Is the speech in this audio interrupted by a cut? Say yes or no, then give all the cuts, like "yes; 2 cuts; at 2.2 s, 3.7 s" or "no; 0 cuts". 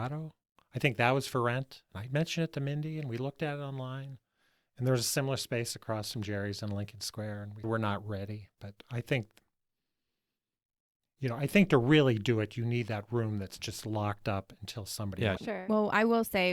yes; 2 cuts; at 7.6 s, 15.4 s